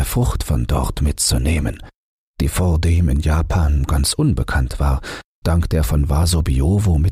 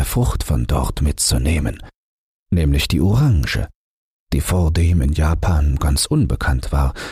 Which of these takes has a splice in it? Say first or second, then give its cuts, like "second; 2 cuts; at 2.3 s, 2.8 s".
first; 2 cuts; at 2.3 s, 5.4 s